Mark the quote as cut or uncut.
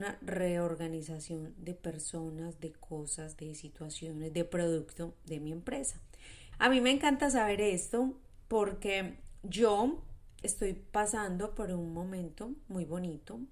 cut